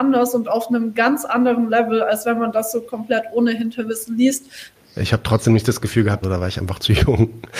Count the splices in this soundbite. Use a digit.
2